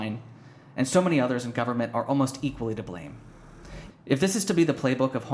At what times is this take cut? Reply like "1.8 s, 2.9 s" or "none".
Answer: 3.9 s

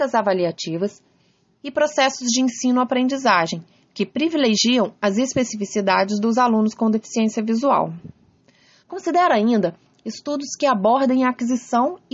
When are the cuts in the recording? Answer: 8.8 s

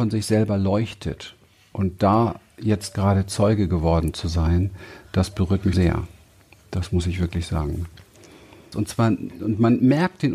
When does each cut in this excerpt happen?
5.7 s, 8.7 s

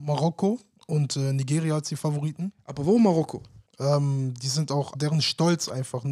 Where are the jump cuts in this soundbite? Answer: 3.7 s, 4.9 s

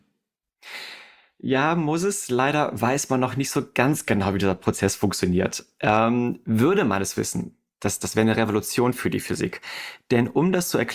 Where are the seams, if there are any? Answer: none

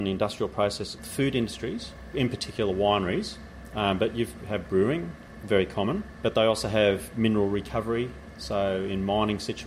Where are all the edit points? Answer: 1.0 s

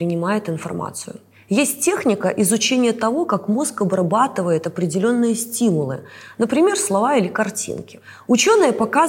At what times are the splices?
none

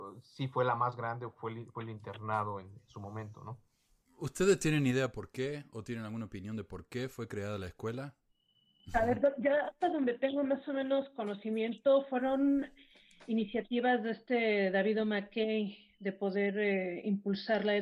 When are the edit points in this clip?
none

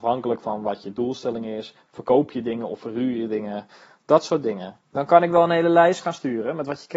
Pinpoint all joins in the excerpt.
4.8 s

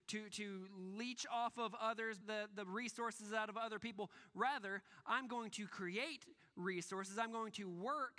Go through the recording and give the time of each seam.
2.2 s

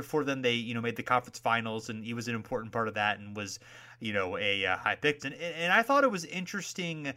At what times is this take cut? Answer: 5.2 s

